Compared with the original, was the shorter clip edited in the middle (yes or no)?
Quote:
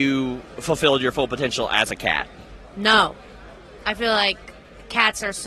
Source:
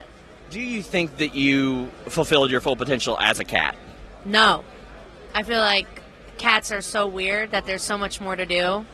no